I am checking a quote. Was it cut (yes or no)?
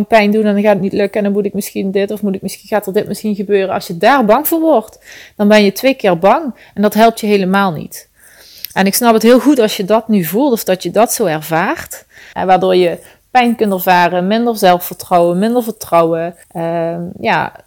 yes